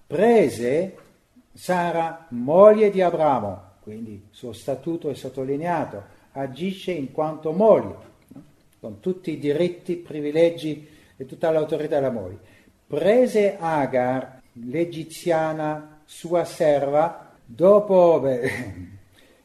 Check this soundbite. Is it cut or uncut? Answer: cut